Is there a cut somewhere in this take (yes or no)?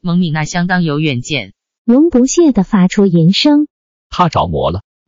yes